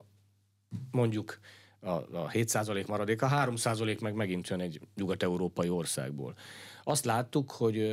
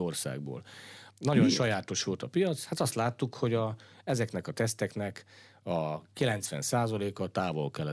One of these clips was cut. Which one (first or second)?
second